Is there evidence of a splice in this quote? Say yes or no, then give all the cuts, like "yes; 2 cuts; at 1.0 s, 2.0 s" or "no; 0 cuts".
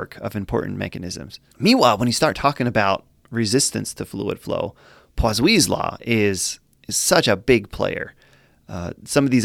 no; 0 cuts